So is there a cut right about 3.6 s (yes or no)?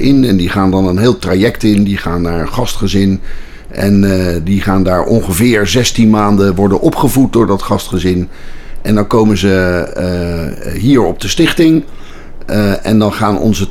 no